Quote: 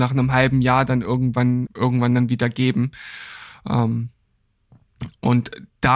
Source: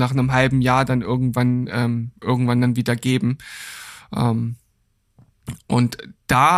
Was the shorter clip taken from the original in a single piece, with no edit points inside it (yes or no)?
no